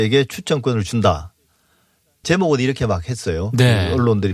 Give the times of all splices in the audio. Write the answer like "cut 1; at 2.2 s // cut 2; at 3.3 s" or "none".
cut 1; at 2.2 s